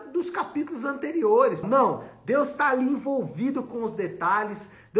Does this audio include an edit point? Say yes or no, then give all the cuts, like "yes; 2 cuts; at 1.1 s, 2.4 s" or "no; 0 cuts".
yes; 1 cut; at 1.6 s